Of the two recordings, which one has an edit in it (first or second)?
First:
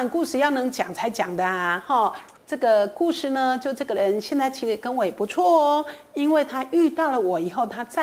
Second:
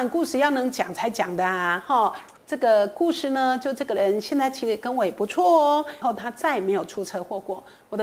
second